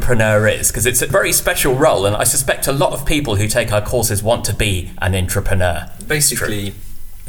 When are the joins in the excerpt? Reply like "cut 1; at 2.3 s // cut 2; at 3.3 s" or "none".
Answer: cut 1; at 6.1 s

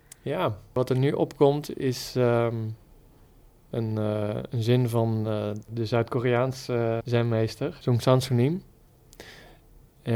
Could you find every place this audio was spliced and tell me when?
cut 1; at 7.0 s

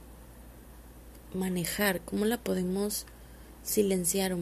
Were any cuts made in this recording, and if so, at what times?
none

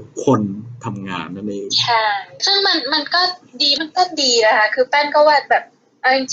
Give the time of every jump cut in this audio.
cut 1; at 3.8 s

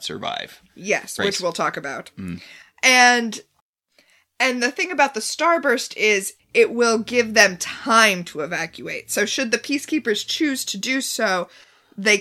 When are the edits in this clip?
cut 1; at 1.2 s // cut 2; at 6.4 s

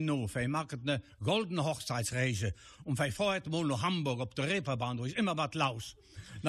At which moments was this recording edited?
none

